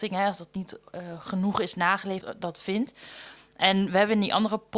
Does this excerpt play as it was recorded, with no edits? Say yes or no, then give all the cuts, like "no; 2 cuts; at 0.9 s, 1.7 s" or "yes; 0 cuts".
no; 1 cut; at 2.2 s